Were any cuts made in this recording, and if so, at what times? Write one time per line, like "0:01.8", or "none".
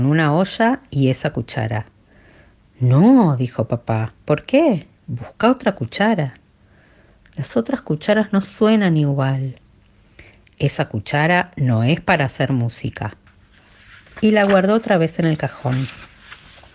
none